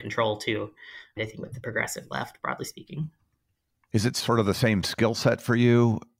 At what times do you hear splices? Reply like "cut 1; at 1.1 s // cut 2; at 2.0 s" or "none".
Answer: cut 1; at 1.2 s